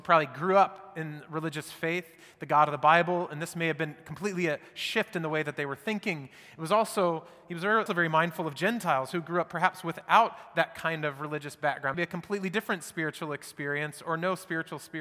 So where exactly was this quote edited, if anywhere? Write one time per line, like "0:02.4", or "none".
0:07.9
0:11.9